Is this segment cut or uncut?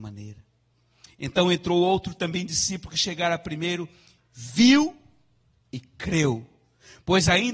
uncut